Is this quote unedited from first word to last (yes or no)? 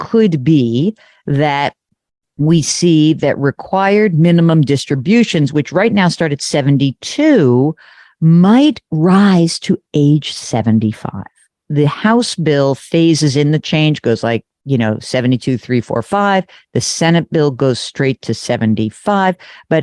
yes